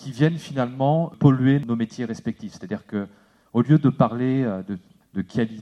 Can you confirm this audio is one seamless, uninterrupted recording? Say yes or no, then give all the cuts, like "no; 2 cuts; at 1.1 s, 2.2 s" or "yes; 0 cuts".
yes; 0 cuts